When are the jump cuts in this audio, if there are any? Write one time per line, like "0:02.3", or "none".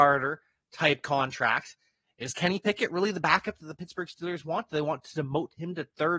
none